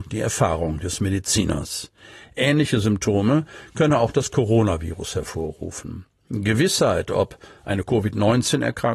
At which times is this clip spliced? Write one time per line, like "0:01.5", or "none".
none